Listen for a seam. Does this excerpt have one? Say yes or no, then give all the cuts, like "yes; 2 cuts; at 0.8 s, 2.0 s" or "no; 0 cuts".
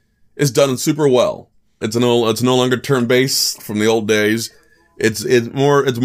yes; 2 cuts; at 1.8 s, 3.6 s